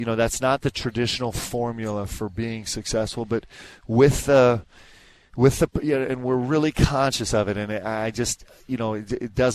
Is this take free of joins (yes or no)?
yes